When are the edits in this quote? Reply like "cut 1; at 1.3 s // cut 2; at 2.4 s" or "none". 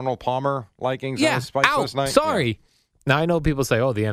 cut 1; at 3.0 s

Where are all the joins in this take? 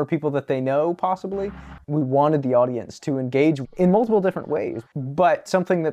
cut 1; at 1.8 s // cut 2; at 4.9 s

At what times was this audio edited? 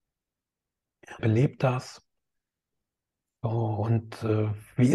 cut 1; at 1.2 s

